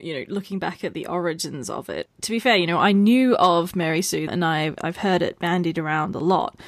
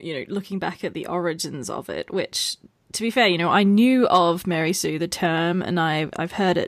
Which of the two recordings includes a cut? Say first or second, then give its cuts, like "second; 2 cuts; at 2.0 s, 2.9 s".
first; 2 cuts; at 2.1 s, 4.3 s